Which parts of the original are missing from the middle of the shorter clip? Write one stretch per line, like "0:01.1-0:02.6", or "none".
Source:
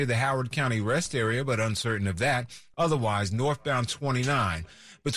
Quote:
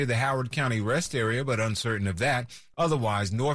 none